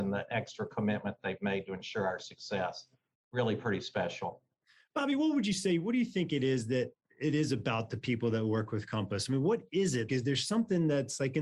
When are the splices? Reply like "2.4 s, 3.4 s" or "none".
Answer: 10.1 s